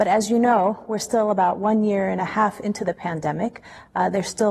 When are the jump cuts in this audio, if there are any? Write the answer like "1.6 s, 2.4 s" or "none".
none